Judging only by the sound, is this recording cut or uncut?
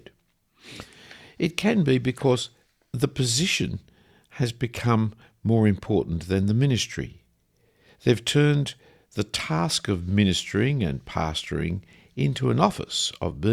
uncut